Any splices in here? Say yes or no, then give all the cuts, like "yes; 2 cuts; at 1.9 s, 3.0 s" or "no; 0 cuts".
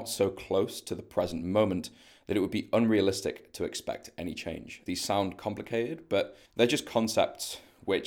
yes; 2 cuts; at 4.9 s, 6.5 s